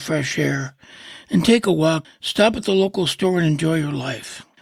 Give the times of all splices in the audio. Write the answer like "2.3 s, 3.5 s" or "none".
2.0 s